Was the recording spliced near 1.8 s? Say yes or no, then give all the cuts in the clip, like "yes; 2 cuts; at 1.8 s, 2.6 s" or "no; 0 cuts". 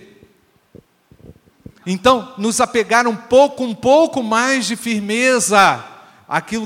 yes; 1 cut; at 1.8 s